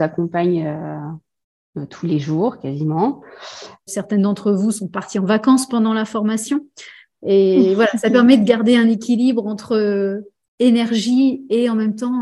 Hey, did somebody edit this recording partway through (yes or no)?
yes